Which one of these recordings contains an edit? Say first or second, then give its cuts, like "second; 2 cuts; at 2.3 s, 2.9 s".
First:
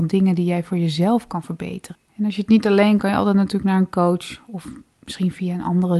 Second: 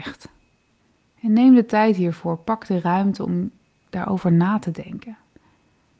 first; 2 cuts; at 1.9 s, 3.0 s